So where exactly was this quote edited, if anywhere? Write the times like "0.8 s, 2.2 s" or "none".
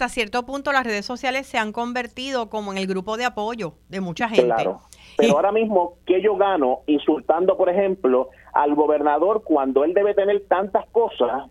5.2 s